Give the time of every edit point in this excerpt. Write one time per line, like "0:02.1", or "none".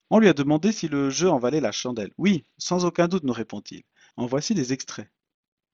0:04.1